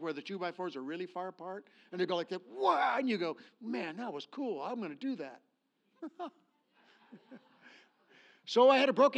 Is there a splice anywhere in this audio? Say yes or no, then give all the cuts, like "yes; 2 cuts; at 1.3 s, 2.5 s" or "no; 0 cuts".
no; 0 cuts